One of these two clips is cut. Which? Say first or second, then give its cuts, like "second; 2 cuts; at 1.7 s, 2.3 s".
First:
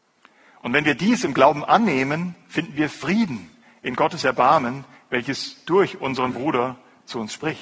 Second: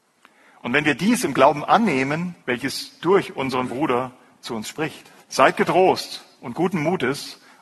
second; 2 cuts; at 2.4 s, 5.2 s